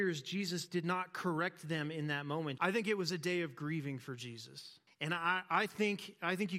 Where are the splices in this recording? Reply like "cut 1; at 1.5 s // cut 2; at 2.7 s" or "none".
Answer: cut 1; at 2.6 s // cut 2; at 4.9 s

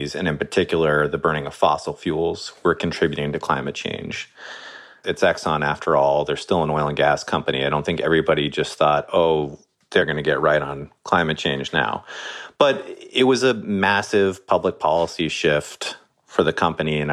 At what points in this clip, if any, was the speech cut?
cut 1; at 5.0 s

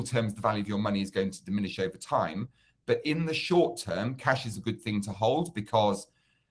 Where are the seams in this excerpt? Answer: cut 1; at 4.5 s

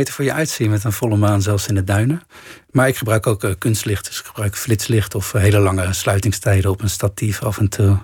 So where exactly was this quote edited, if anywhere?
none

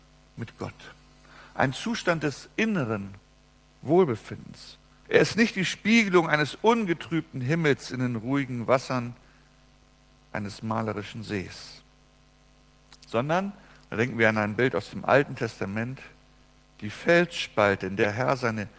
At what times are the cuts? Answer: cut 1; at 5.0 s

